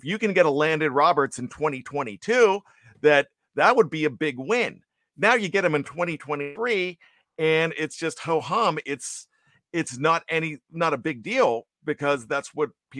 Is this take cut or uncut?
uncut